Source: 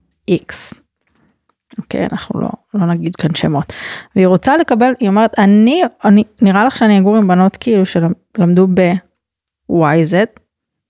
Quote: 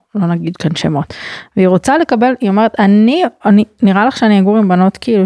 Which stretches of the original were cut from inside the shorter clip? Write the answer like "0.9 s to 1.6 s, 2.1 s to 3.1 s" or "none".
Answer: none